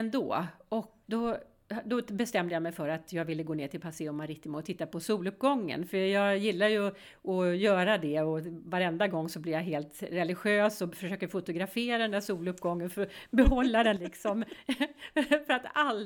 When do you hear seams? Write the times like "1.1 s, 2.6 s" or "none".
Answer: 1.0 s

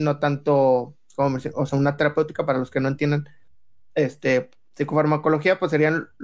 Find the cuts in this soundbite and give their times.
none

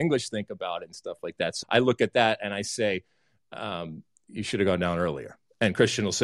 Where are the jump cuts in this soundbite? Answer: 1.6 s

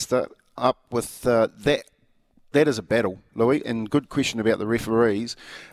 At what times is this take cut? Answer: 3.6 s

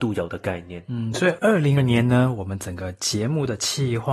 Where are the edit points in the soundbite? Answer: 1.8 s

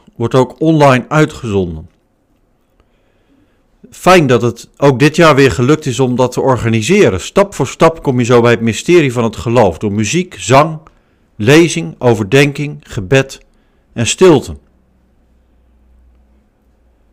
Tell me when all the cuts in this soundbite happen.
none

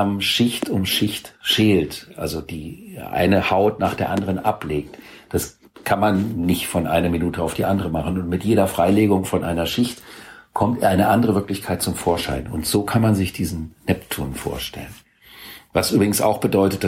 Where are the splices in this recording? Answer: none

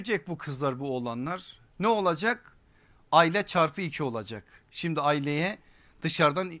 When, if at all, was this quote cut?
none

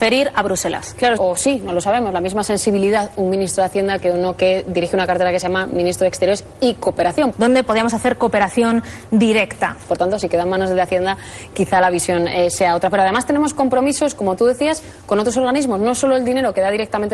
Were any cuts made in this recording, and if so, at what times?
1.2 s, 7.3 s, 9.9 s

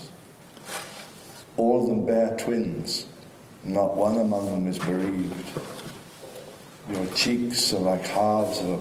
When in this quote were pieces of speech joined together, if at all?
1.4 s

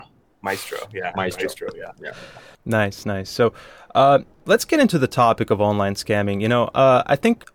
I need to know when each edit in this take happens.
3.0 s

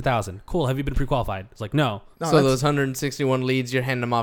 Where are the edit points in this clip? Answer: 2.1 s

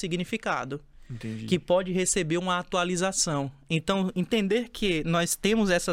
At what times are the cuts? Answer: none

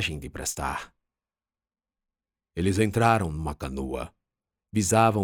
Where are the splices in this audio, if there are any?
none

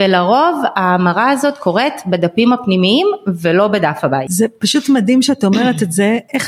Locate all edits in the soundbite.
none

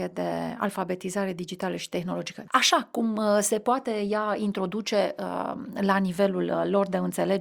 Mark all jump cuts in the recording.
2.5 s

